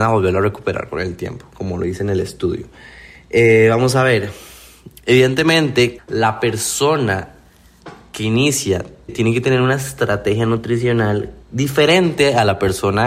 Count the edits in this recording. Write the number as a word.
three